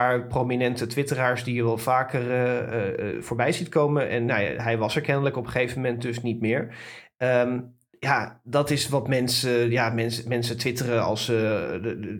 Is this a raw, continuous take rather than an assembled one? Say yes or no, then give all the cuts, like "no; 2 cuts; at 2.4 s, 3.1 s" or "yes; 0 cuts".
yes; 0 cuts